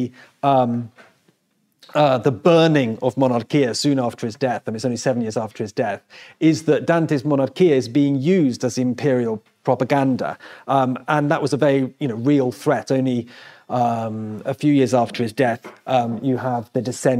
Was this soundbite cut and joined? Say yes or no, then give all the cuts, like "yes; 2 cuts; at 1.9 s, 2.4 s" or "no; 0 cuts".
no; 0 cuts